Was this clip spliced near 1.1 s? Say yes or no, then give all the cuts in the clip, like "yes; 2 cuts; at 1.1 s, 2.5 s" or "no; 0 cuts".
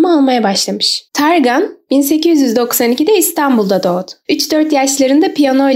yes; 1 cut; at 1.1 s